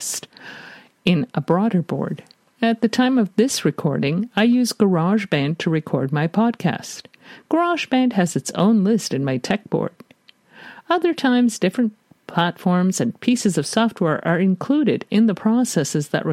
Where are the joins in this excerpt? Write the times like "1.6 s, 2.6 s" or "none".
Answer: none